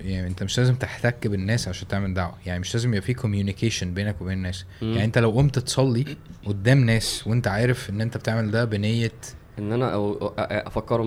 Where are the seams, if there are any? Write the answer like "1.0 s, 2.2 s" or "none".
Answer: none